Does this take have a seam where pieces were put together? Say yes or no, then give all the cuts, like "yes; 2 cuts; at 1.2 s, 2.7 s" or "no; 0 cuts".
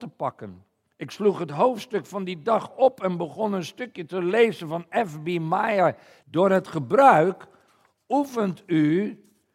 yes; 1 cut; at 6.2 s